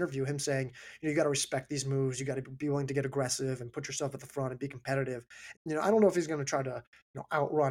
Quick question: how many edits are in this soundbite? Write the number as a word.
one